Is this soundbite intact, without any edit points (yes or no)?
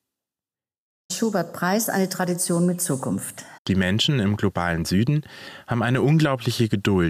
no